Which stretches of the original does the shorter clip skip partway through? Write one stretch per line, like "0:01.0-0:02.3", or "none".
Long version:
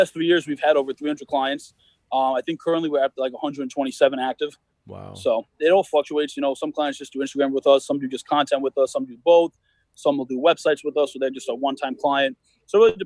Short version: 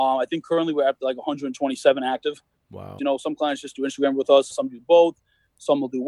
0:05.1-0:06.3
0:07.9-0:08.9